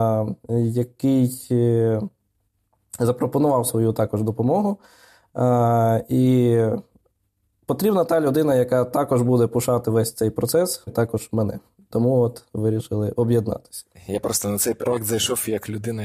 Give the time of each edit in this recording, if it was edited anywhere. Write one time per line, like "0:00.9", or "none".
0:10.9